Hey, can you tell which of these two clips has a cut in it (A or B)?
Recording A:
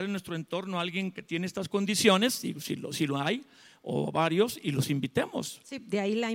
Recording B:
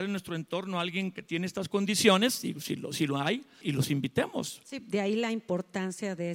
B